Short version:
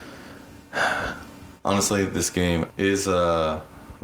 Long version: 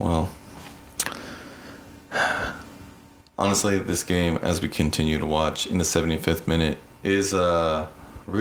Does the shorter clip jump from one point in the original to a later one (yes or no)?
yes